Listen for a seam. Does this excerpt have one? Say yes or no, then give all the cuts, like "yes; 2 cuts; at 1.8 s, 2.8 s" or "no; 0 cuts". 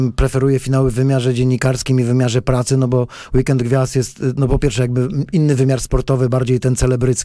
no; 0 cuts